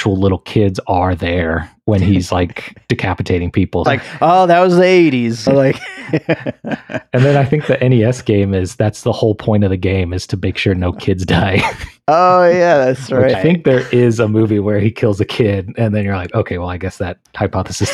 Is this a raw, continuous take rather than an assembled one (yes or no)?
no